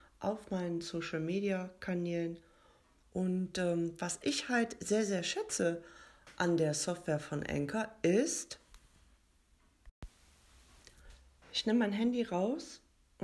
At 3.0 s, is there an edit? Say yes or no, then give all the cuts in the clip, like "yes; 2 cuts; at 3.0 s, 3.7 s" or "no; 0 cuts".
yes; 1 cut; at 3.0 s